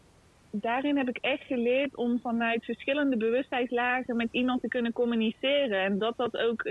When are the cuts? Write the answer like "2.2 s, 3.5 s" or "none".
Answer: none